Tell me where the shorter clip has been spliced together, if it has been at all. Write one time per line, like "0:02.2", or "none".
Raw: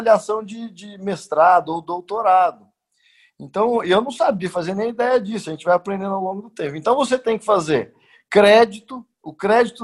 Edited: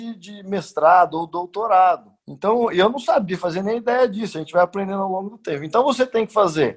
0:02.2